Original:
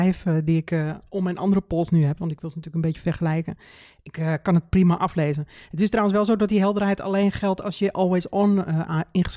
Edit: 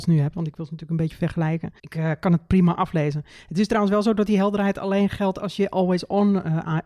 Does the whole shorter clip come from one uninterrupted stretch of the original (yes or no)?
no